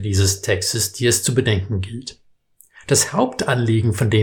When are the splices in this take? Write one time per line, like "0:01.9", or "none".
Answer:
none